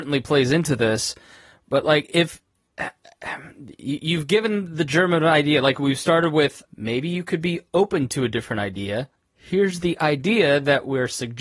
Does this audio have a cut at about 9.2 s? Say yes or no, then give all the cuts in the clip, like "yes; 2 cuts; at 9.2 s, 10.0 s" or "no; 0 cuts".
no; 1 cut; at 6.7 s